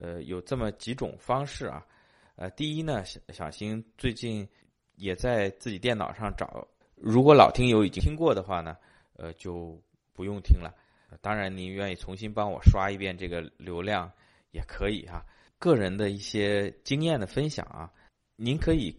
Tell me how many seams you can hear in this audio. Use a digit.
2